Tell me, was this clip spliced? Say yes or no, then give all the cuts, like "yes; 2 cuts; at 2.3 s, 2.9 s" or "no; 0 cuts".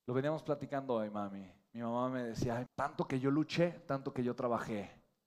yes; 1 cut; at 2.7 s